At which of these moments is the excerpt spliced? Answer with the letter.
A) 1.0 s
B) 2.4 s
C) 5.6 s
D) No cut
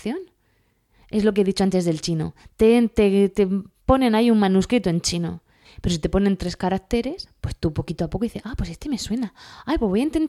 C